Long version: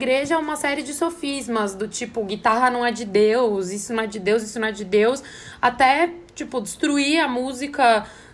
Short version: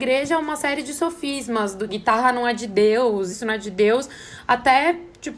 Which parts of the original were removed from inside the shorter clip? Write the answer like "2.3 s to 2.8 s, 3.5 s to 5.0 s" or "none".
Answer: 1.9 s to 2.3 s, 3.7 s to 4.5 s